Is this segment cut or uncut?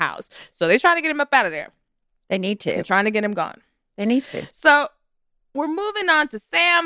uncut